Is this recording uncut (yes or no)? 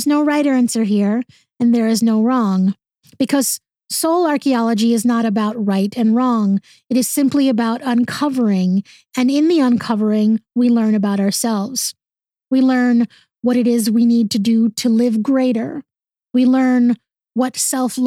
yes